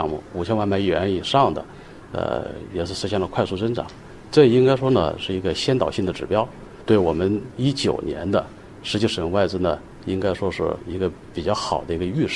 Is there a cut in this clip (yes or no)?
no